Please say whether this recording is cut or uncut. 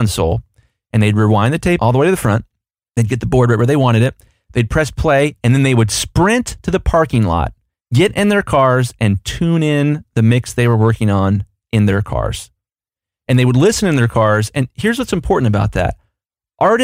uncut